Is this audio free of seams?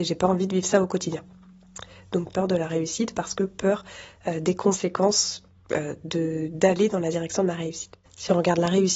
no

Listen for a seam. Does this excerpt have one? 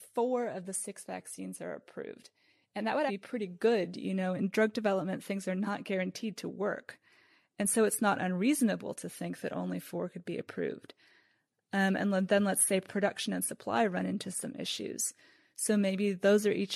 yes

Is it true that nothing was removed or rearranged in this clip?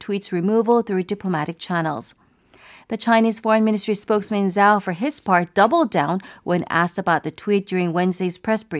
yes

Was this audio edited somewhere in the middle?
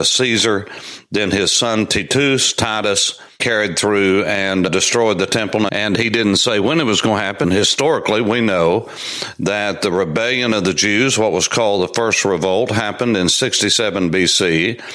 yes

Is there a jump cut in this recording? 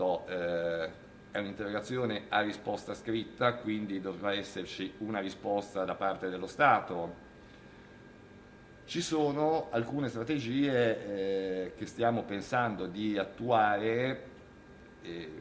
no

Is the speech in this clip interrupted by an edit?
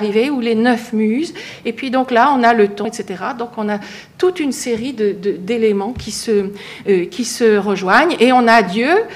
yes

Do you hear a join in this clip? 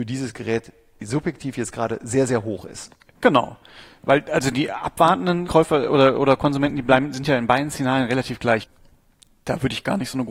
yes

